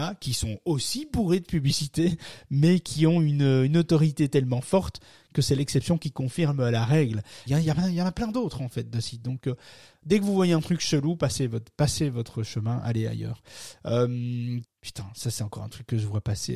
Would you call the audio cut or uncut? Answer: cut